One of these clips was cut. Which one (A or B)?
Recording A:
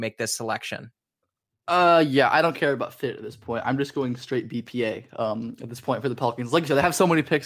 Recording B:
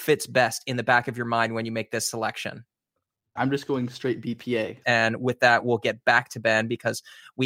B